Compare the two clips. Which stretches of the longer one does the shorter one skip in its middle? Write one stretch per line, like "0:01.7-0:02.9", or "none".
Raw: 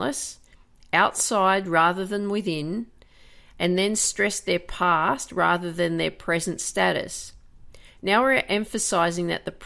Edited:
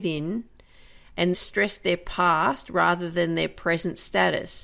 0:03.7-0:03.9